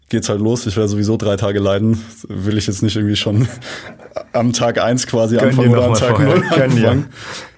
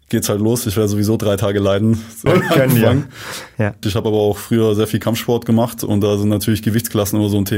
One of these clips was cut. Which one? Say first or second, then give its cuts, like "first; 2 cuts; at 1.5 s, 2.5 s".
second; 2 cuts; at 2.3 s, 3.8 s